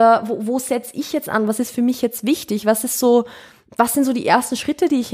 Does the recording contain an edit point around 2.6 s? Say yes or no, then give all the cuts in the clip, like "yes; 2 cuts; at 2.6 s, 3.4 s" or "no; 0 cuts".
no; 0 cuts